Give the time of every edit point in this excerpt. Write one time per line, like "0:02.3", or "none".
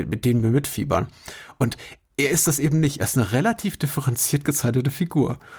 none